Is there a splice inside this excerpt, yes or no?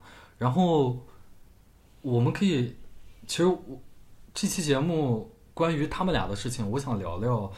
no